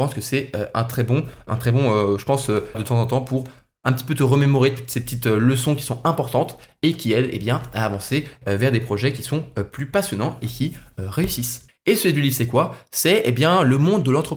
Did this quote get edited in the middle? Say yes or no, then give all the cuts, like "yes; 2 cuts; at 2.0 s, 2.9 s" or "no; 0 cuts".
yes; 3 cuts; at 1.5 s, 2.7 s, 11.7 s